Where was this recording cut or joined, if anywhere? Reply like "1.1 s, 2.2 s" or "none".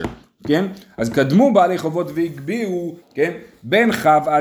3.0 s